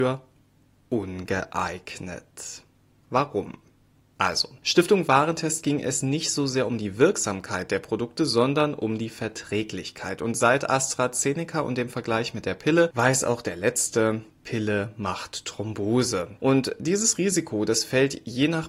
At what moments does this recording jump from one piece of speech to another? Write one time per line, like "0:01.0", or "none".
none